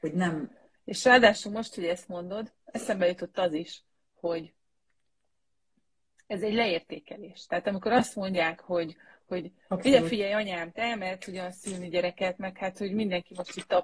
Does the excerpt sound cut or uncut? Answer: uncut